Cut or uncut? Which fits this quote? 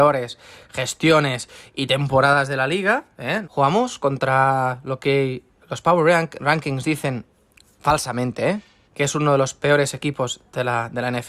cut